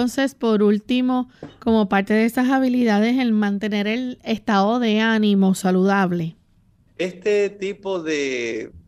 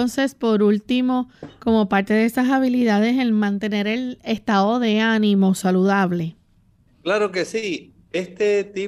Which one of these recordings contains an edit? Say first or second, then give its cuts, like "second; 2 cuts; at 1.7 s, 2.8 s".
first; 1 cut; at 6.9 s